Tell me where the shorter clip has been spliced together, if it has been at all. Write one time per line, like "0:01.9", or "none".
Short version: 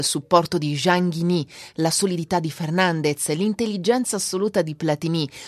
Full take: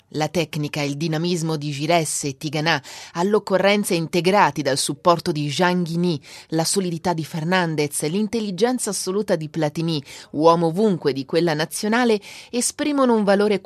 none